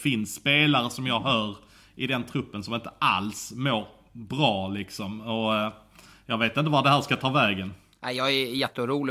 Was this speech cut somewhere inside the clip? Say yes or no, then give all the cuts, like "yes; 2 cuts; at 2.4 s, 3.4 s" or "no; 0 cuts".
no; 0 cuts